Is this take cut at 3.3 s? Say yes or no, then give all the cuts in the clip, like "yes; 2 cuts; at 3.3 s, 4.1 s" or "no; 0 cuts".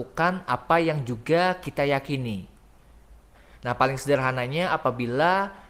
yes; 1 cut; at 3.3 s